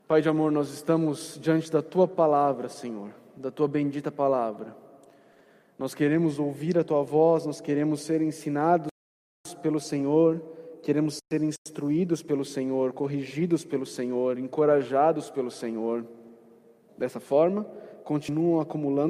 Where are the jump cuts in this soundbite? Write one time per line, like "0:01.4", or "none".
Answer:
0:16.9

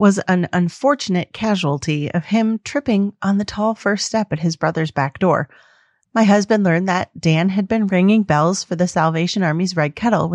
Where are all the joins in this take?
0:06.0

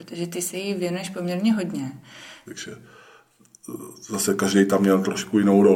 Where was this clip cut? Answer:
0:02.5

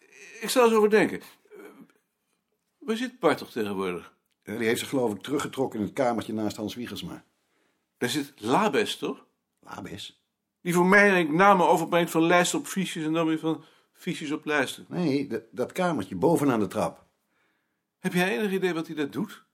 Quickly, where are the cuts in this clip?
none

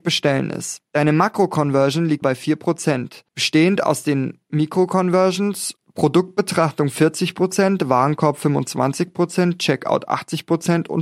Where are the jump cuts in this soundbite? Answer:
0:02.2

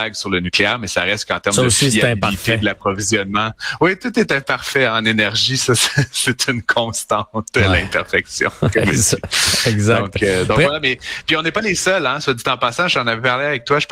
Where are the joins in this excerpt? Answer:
none

